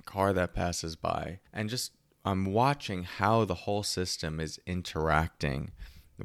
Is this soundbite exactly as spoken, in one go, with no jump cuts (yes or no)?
no